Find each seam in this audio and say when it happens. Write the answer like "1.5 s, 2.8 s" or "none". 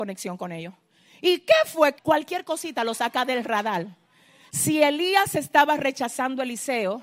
2.0 s, 4.5 s